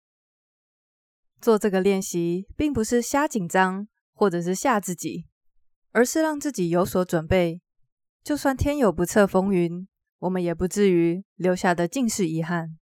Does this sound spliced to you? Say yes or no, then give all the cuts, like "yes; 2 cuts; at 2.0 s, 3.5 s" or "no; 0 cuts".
no; 0 cuts